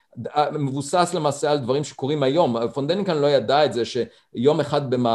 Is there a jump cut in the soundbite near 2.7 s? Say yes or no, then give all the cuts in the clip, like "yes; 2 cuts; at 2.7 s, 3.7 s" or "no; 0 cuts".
no; 0 cuts